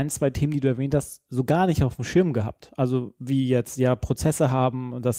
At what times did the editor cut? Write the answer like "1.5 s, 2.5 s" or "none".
none